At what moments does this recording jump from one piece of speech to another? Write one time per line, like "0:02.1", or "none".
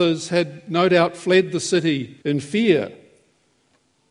0:02.2